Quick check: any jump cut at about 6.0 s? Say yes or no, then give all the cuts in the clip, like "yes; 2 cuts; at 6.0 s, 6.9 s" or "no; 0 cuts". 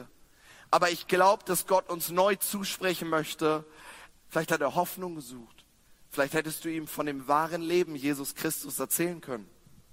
no; 1 cut; at 4.1 s